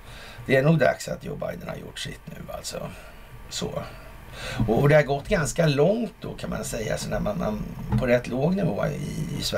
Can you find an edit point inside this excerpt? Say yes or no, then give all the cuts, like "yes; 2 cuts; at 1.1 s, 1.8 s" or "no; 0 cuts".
no; 0 cuts